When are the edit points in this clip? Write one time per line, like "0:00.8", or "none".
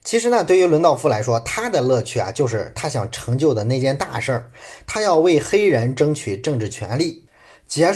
none